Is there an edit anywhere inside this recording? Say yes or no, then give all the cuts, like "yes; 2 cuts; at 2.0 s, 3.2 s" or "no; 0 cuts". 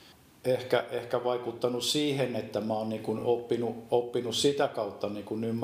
no; 0 cuts